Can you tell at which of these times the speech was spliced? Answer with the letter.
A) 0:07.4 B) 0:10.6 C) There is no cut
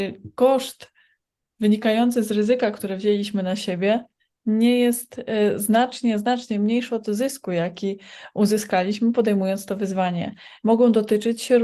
B